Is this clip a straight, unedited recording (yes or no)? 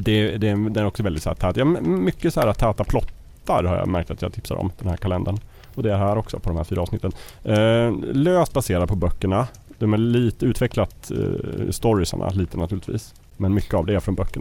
yes